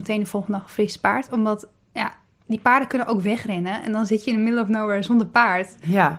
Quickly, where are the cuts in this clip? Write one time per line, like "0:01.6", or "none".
none

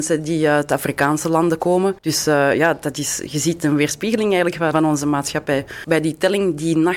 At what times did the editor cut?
0:02.0
0:04.7
0:05.8

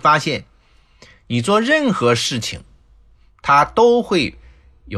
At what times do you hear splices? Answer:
none

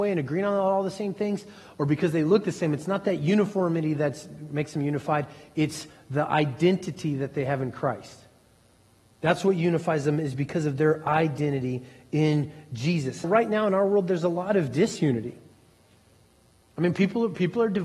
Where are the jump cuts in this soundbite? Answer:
0:13.2

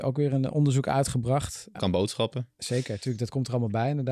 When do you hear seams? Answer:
0:01.7

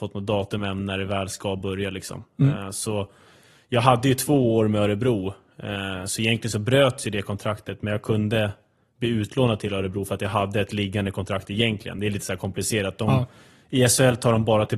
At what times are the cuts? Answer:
none

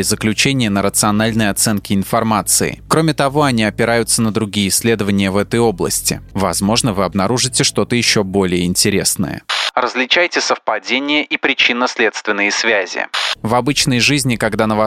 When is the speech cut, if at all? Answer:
0:06.3
0:13.3

